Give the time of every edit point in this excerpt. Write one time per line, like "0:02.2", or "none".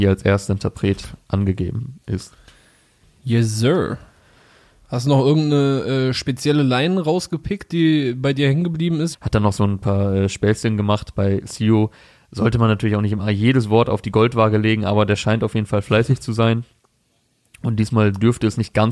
0:09.1